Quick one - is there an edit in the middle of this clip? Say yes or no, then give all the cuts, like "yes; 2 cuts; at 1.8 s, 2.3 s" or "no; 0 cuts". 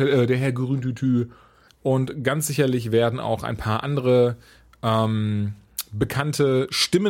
yes; 1 cut; at 1.7 s